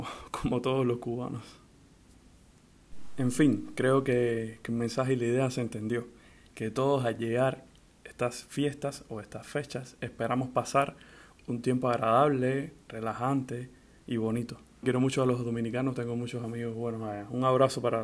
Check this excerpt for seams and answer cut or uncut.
cut